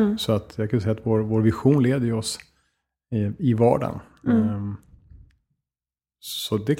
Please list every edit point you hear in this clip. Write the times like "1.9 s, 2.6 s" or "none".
none

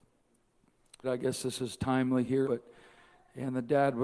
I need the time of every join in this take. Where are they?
1.0 s, 2.4 s

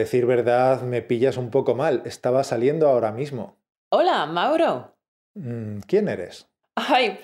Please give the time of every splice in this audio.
3.7 s

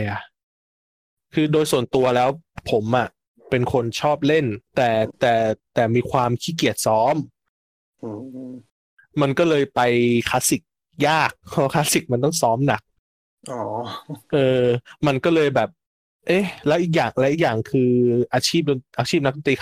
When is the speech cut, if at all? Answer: none

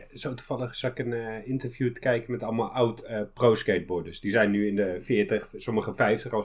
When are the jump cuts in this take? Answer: none

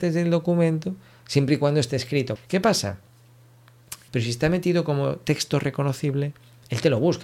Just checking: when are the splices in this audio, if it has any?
2.4 s, 4.1 s

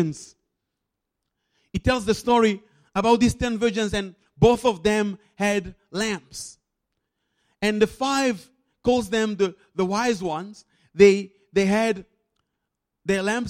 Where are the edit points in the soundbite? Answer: none

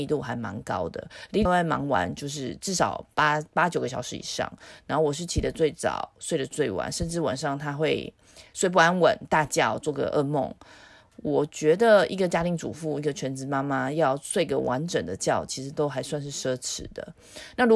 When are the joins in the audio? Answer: 1.5 s

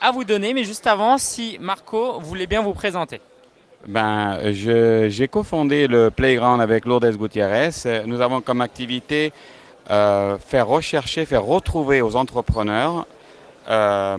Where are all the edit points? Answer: none

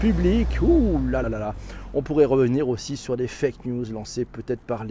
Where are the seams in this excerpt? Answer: 1.2 s

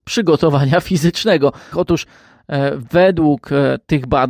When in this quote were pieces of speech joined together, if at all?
1.7 s

